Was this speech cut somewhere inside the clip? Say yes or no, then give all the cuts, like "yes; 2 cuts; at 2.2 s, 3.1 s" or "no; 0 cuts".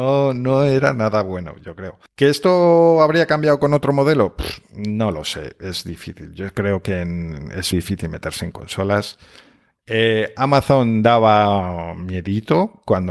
yes; 2 cuts; at 2.1 s, 7.7 s